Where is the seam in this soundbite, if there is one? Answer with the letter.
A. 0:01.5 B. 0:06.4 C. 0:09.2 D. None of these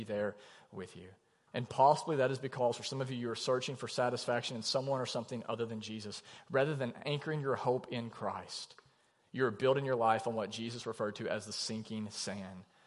A